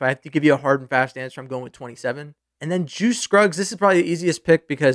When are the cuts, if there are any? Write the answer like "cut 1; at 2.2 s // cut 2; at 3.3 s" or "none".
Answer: none